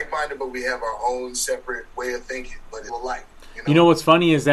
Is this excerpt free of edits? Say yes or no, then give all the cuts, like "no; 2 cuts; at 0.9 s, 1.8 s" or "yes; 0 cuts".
no; 1 cut; at 2.9 s